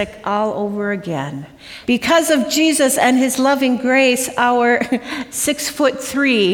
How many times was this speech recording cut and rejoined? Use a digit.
1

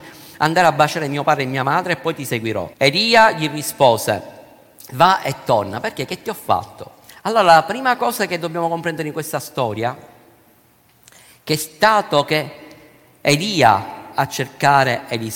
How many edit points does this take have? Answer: 2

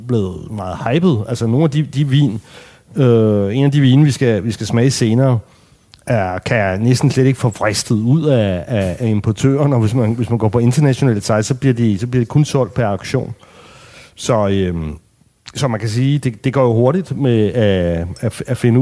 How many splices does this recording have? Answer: 0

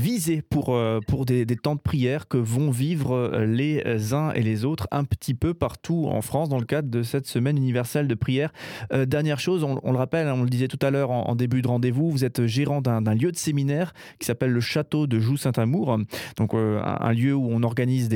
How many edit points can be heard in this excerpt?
1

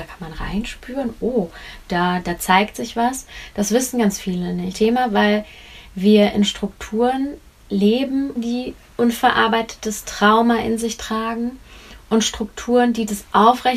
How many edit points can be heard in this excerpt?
2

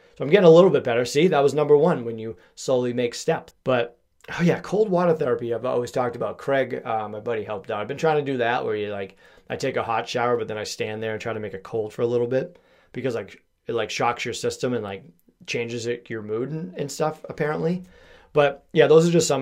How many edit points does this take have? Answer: 1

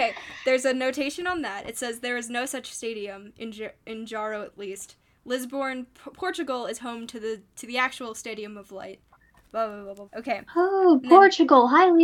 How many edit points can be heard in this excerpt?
1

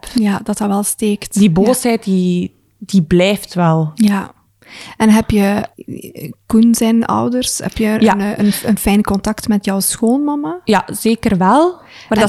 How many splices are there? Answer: 0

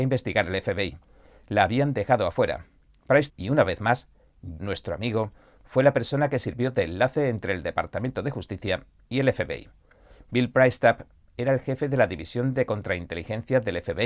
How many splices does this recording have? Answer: 2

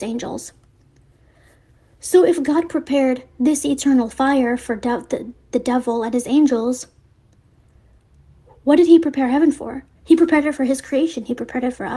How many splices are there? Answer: 1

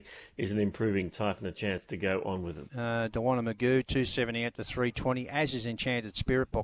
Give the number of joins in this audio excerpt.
1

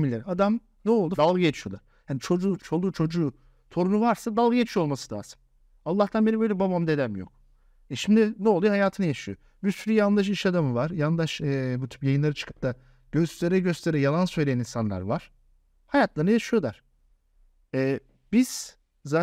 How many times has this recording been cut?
2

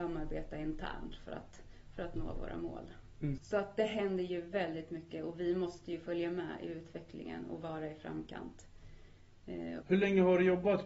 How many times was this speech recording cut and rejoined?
2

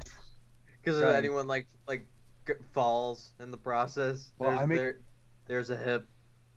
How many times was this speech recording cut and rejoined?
1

